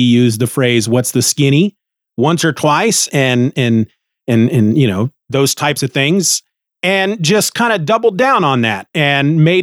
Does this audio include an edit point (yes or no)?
no